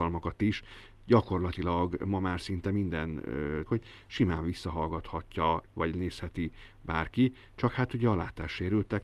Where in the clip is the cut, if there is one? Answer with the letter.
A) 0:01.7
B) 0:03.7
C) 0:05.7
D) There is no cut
B